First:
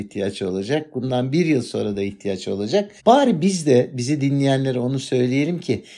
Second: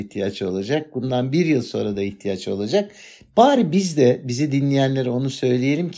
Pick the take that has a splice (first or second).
first